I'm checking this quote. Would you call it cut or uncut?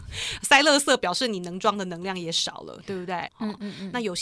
cut